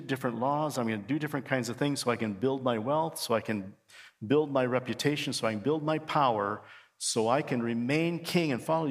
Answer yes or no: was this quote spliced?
no